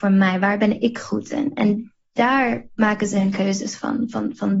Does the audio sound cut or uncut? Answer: uncut